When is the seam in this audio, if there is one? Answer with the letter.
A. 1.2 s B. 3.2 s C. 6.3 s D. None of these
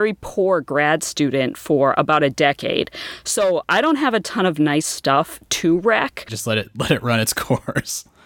C